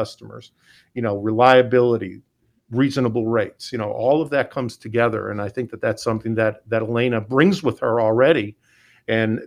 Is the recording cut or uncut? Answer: uncut